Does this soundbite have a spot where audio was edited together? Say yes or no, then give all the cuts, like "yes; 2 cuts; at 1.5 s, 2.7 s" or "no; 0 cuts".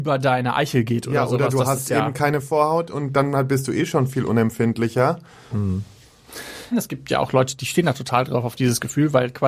yes; 2 cuts; at 5.5 s, 6.7 s